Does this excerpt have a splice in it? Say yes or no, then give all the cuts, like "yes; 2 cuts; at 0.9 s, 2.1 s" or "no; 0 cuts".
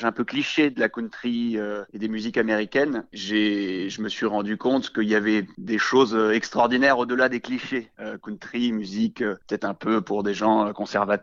yes; 1 cut; at 7.9 s